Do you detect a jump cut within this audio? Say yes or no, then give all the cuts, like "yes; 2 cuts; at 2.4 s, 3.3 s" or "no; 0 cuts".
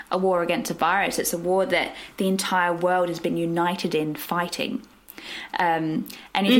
no; 0 cuts